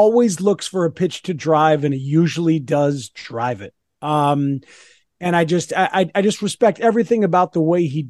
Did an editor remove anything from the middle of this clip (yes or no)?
no